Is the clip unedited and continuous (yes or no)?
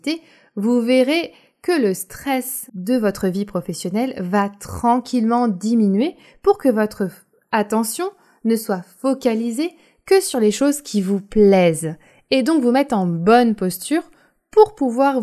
yes